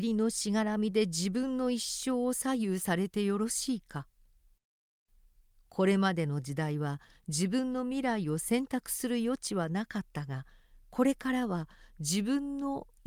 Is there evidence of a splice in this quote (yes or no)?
no